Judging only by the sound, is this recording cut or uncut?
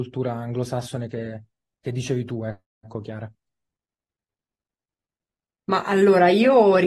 uncut